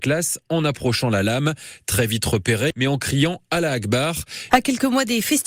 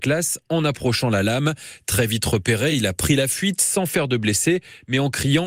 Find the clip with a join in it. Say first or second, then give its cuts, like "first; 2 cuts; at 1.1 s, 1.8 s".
first; 2 cuts; at 2.7 s, 4.5 s